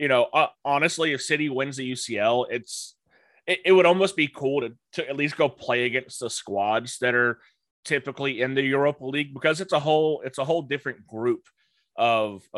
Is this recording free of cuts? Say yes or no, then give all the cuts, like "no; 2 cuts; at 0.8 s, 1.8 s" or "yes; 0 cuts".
yes; 0 cuts